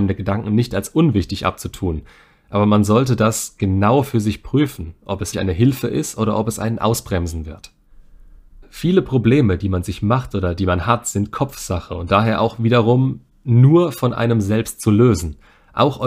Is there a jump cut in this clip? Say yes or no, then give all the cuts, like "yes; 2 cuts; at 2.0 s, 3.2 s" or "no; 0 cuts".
yes; 2 cuts; at 5.3 s, 8.6 s